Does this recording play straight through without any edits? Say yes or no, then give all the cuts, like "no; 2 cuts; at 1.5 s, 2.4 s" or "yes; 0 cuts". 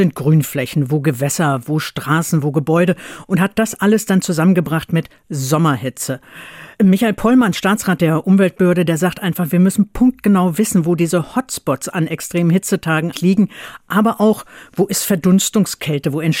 no; 1 cut; at 13.1 s